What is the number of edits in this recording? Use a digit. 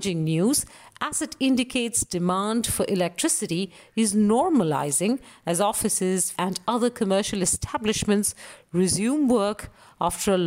1